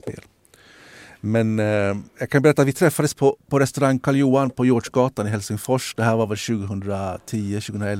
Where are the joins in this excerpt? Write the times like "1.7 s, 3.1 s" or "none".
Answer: none